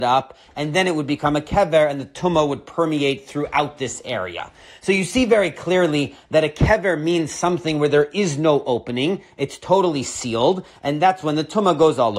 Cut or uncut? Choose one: uncut